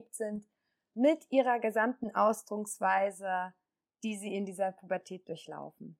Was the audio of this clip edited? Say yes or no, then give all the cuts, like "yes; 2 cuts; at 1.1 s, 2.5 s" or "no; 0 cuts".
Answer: no; 0 cuts